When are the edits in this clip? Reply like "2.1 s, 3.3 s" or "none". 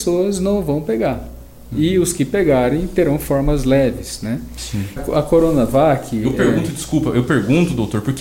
5.0 s